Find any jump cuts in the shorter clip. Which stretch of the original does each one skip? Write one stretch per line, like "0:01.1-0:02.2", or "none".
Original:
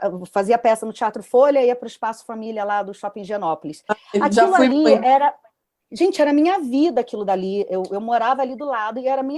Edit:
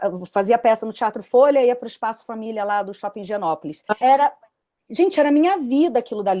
0:04.0-0:05.0

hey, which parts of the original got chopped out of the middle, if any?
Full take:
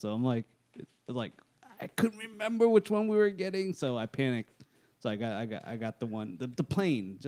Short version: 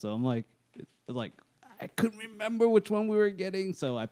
none

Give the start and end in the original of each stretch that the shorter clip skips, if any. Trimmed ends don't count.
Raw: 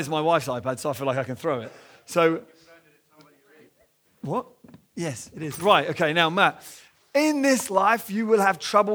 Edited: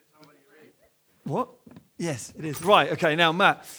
none

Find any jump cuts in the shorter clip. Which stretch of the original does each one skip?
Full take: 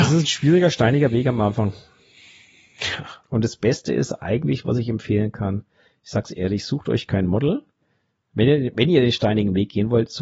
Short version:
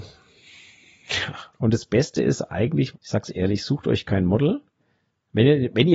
0:04.6-0:05.9

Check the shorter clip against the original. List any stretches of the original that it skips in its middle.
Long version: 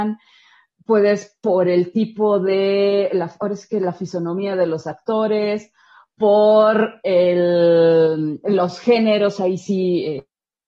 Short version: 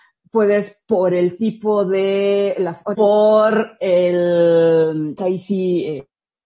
0:03.5-0:06.2
0:08.4-0:09.4

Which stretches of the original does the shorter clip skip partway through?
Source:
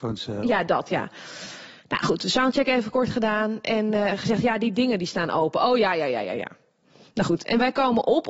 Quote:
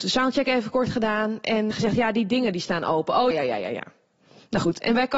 0:03.9-0:04.2
0:05.8-0:06.0

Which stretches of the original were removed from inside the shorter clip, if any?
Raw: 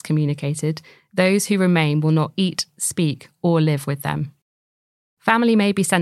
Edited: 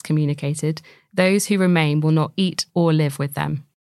0:02.7-0:03.4

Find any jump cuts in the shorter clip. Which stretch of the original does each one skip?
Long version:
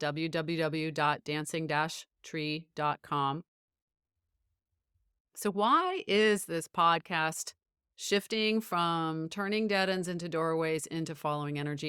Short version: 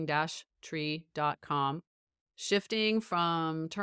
0:03.9-0:07.9

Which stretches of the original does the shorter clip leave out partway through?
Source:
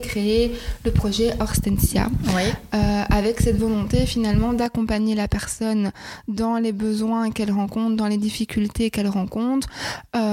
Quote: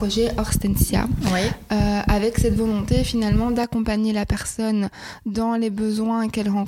none

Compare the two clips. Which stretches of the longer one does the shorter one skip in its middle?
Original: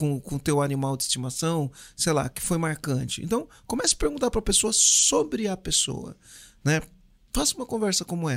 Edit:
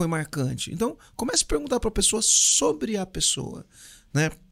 none

